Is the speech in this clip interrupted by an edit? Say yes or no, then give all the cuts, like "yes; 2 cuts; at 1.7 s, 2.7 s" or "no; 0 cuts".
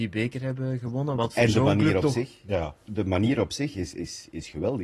no; 0 cuts